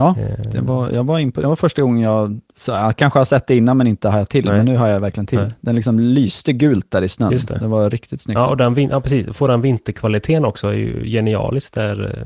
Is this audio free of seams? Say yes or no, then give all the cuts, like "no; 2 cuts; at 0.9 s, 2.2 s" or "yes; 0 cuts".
yes; 0 cuts